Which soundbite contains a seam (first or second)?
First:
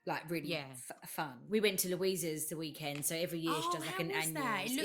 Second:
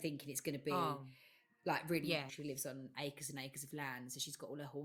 second